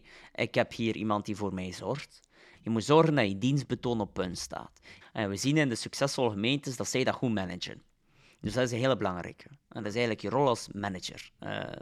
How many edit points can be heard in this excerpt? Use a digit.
2